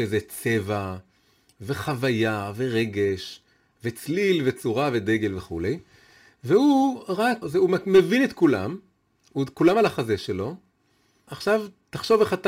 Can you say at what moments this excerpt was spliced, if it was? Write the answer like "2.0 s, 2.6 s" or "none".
7.4 s, 11.3 s